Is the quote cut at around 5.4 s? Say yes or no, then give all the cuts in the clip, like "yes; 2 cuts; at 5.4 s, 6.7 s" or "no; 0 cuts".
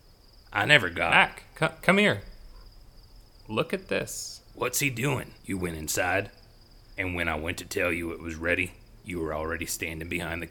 yes; 3 cuts; at 5.4 s, 7.0 s, 9.0 s